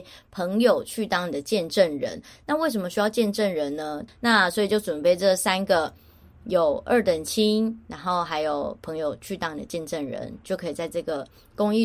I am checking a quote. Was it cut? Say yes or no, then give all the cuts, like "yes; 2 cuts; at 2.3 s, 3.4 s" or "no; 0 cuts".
yes; 1 cut; at 4.1 s